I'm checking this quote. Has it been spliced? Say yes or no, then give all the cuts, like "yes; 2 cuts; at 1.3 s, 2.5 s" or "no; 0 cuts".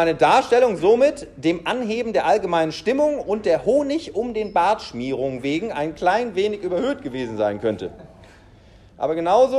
no; 0 cuts